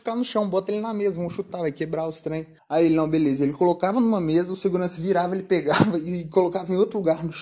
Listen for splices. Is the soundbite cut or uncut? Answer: uncut